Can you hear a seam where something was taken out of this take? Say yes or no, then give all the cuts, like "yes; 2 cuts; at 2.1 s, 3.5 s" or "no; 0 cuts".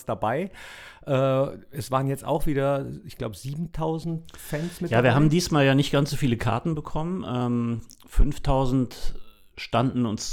no; 0 cuts